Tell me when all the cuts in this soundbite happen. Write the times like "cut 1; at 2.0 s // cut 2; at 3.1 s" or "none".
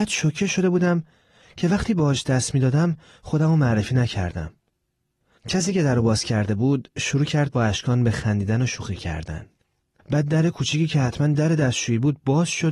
cut 1; at 5.4 s // cut 2; at 10.0 s